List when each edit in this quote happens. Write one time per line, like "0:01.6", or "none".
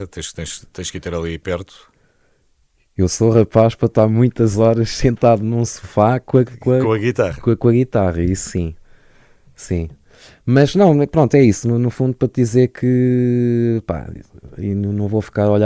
none